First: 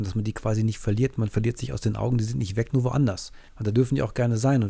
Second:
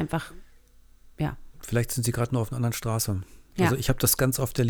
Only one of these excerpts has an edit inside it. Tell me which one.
first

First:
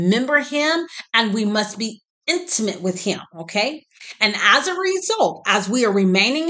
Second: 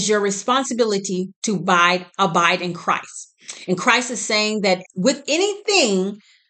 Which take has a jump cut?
second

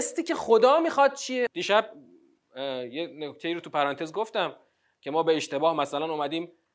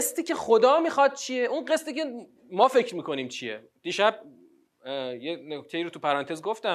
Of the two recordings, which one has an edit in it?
first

